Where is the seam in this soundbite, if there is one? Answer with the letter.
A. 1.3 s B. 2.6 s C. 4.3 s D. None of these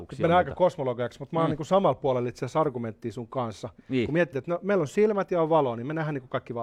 C